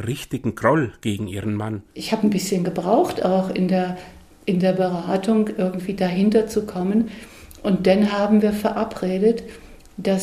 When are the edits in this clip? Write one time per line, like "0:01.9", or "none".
none